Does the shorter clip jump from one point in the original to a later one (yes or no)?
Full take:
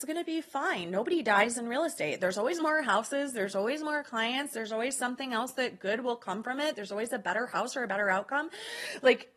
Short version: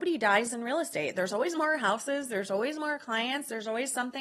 no